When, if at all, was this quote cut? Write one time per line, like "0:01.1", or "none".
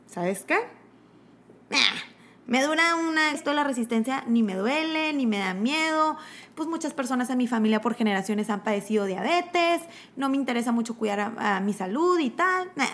0:03.3